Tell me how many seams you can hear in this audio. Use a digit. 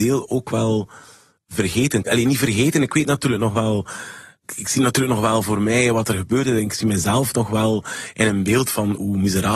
0